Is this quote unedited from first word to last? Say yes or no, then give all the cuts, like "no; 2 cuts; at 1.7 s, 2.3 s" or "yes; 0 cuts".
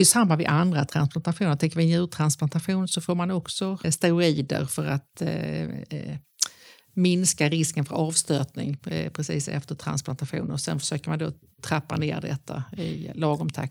no; 1 cut; at 3.8 s